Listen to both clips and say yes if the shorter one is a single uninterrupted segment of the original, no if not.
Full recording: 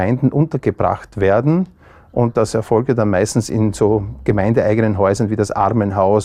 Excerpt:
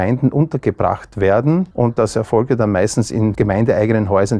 no